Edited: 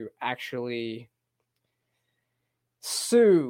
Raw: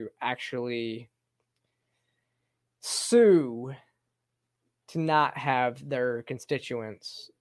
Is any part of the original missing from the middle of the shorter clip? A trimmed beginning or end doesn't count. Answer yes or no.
no